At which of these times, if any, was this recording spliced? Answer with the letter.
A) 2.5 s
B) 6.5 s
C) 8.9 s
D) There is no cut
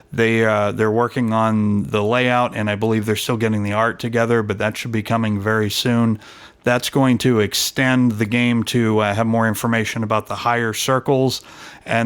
D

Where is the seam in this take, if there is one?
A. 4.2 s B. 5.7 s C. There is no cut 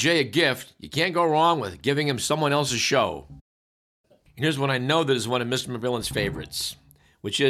C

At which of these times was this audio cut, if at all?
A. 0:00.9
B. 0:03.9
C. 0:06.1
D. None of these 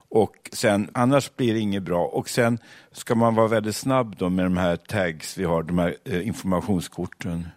A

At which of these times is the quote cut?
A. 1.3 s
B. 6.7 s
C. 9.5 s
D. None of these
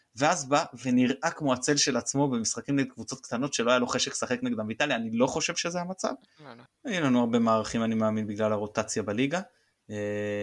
B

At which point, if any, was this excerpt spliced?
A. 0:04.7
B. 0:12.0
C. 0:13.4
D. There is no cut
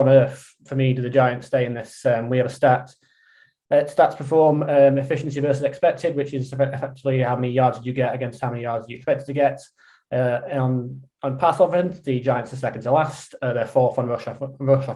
B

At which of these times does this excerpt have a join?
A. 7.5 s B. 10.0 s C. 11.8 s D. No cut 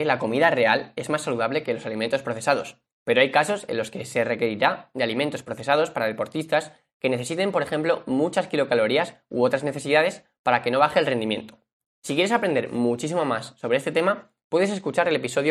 D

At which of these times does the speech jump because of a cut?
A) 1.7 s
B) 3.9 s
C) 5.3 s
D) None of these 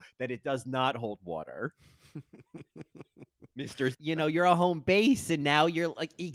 B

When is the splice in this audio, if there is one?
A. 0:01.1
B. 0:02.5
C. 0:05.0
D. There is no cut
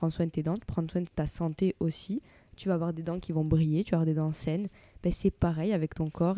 A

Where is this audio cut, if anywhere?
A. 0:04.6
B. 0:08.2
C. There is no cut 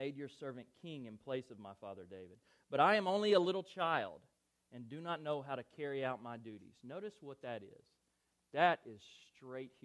C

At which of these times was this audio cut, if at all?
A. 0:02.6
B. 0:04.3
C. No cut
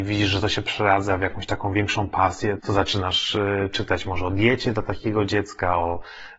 A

